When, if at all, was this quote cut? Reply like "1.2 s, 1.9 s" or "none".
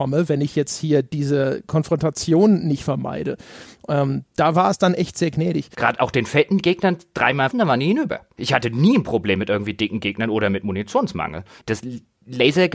5.7 s, 7.5 s, 11.6 s

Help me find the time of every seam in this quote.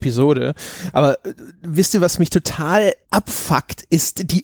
3.0 s

